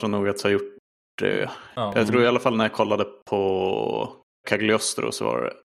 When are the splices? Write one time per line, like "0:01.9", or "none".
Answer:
0:04.4